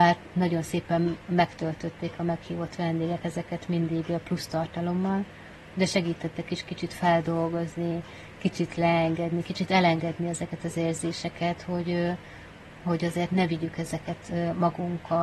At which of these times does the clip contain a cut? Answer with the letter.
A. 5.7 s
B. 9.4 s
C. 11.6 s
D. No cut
D